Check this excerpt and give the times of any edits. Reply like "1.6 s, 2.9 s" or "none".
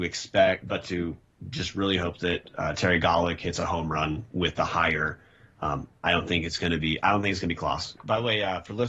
8.0 s

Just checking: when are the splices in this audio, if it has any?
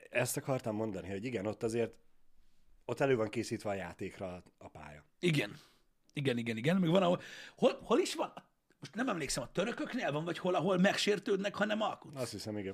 none

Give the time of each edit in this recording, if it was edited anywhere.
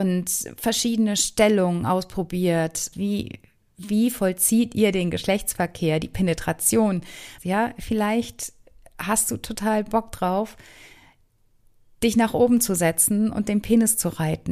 2.9 s, 7.4 s

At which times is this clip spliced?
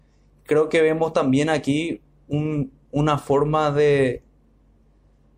none

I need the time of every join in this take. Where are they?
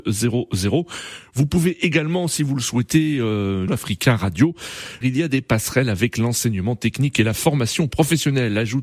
3.7 s, 5.0 s

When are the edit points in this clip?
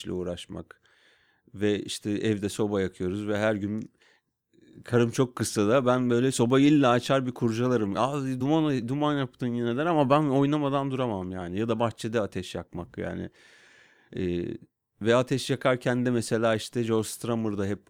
none

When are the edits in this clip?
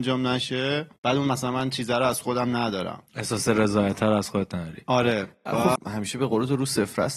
1.0 s, 3.1 s, 5.8 s

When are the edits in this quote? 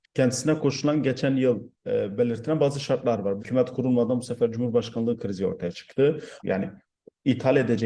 3.4 s, 6.4 s

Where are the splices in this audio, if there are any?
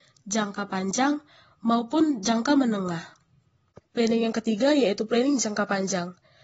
3.8 s

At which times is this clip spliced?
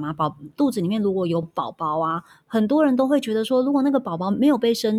none

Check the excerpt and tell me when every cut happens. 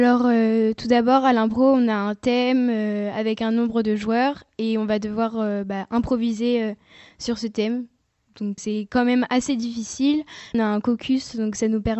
8.6 s, 10.5 s

